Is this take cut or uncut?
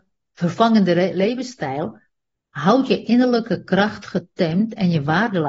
uncut